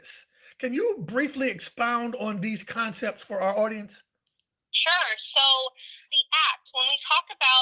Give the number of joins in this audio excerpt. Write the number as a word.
one